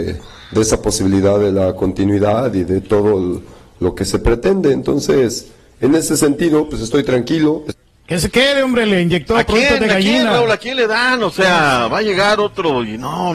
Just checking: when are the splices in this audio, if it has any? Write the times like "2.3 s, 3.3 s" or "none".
none